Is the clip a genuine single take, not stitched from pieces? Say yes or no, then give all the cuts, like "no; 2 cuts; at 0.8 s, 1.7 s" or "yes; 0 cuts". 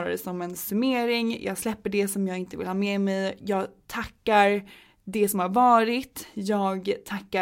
yes; 0 cuts